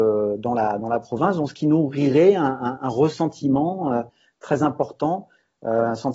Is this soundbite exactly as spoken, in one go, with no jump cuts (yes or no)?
yes